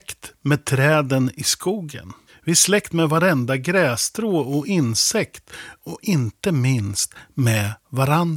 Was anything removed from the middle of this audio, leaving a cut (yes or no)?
no